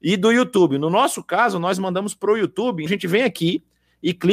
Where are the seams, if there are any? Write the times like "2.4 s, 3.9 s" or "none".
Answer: 2.9 s